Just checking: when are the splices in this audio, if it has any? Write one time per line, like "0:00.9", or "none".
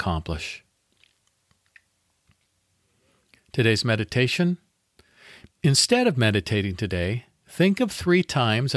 none